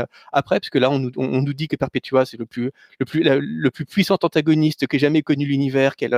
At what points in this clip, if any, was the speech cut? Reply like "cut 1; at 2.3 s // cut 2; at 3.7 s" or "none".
none